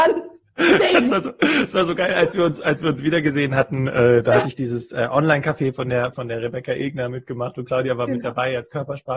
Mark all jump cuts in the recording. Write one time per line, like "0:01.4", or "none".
0:06.1